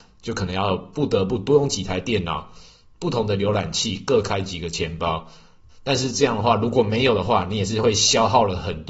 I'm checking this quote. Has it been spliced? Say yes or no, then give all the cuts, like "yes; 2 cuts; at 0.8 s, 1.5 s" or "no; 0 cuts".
yes; 1 cut; at 5.7 s